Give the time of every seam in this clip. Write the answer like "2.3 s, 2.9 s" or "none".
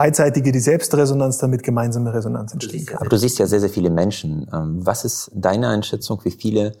none